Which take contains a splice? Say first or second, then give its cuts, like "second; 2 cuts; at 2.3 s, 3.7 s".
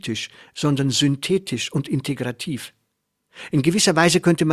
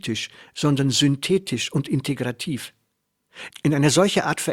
second; 1 cut; at 3.5 s